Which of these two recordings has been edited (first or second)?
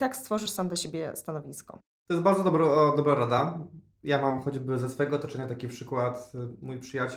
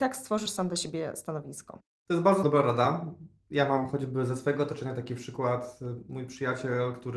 second